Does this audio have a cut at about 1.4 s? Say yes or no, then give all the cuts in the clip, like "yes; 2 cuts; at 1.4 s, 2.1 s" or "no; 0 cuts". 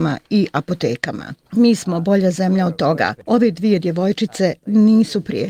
yes; 1 cut; at 1.4 s